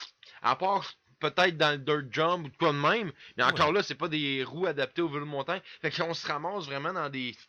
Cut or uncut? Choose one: uncut